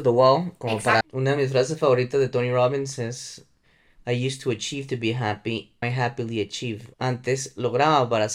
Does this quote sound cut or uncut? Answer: cut